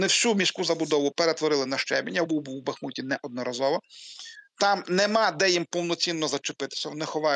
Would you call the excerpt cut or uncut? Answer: uncut